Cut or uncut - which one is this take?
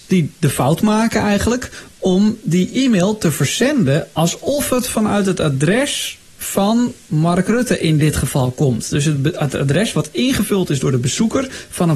uncut